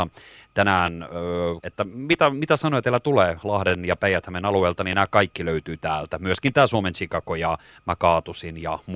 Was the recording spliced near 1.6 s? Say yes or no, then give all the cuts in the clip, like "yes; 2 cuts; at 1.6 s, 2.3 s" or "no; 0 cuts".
yes; 1 cut; at 1.6 s